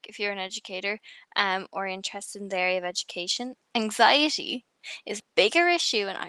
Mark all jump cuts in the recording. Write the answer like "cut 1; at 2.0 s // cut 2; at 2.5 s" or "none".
cut 1; at 3.6 s // cut 2; at 5.2 s